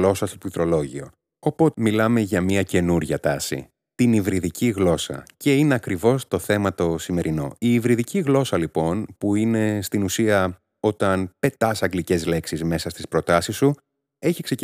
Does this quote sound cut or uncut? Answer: cut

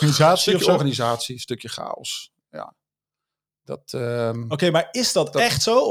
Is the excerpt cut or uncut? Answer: uncut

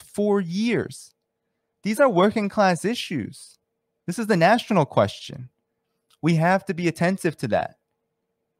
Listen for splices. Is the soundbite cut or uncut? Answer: uncut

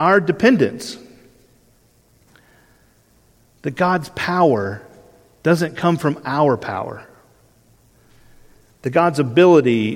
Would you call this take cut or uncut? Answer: uncut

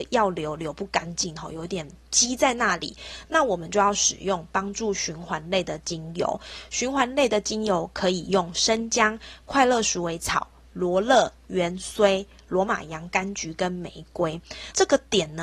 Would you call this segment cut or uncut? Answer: uncut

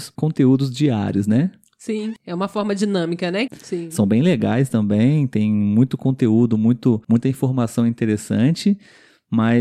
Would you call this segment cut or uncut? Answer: cut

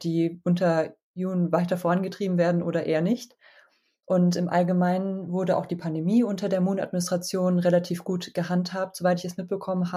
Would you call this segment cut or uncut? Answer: uncut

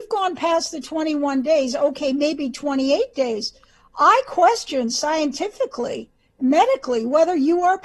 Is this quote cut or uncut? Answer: uncut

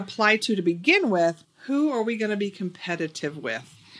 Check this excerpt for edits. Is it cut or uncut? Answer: cut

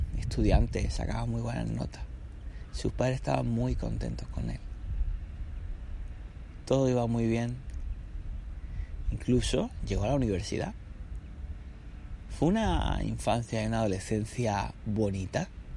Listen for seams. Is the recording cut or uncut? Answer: uncut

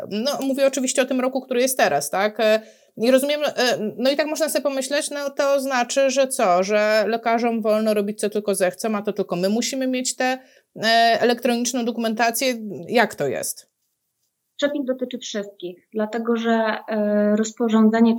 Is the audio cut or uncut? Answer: uncut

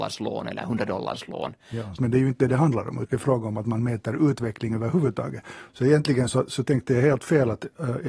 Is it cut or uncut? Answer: cut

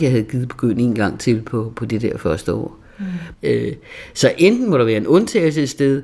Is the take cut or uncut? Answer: cut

